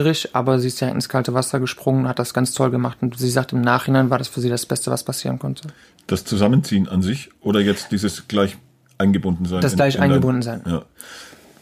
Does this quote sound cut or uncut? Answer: uncut